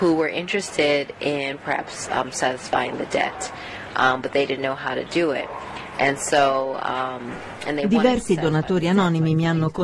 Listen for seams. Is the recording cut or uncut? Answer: uncut